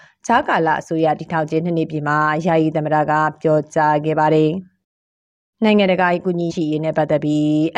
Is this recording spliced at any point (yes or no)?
yes